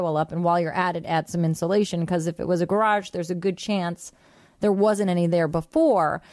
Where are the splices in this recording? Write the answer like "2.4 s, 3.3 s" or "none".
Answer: none